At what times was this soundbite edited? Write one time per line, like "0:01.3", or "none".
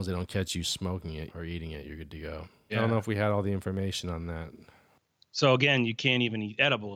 0:01.3
0:02.7

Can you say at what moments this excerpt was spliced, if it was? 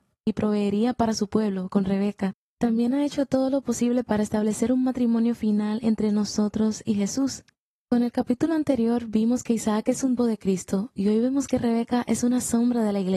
0:07.8
0:10.2

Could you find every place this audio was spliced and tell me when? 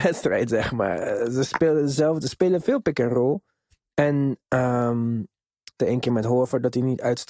0:05.8

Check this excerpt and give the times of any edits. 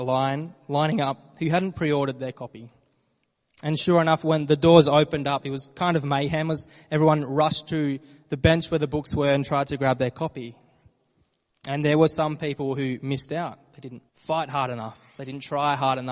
0:14.1

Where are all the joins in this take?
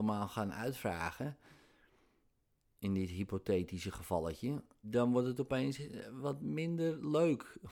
0:04.8

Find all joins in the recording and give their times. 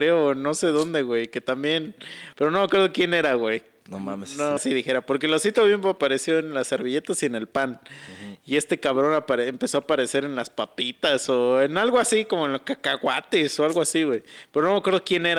0:02.3
0:04.6

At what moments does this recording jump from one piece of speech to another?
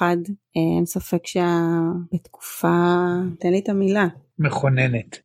0:02.1
0:03.4

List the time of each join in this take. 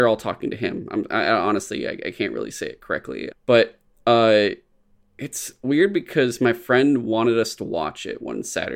0:03.3

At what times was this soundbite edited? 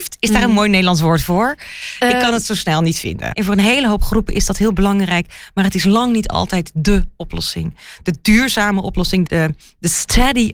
0:03.3
0:09.3

